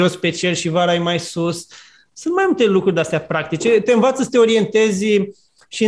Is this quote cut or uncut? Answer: uncut